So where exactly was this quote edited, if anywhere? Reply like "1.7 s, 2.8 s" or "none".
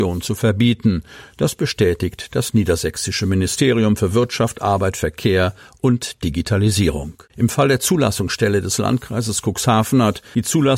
7.3 s